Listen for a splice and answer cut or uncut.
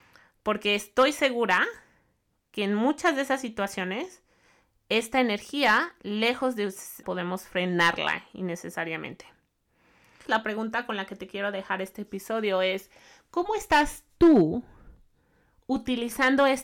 cut